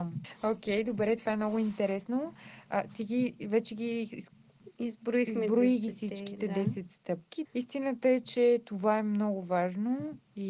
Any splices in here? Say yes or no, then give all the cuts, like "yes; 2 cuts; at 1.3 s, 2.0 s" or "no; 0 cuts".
yes; 1 cut; at 7.4 s